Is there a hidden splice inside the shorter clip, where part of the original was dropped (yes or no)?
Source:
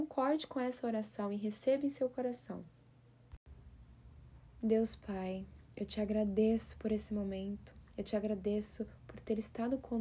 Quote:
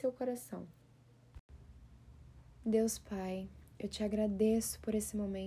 no